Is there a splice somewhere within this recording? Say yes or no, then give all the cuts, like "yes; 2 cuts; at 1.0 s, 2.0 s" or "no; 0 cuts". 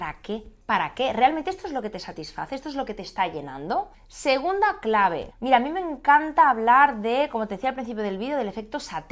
no; 0 cuts